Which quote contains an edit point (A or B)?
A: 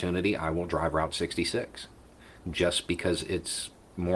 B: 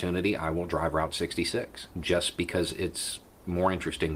B